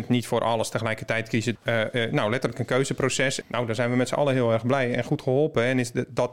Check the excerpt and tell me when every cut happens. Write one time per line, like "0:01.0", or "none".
0:01.6
0:03.4